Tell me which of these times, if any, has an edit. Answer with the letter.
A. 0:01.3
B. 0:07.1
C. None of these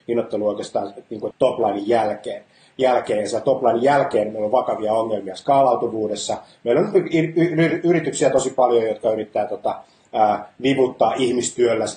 A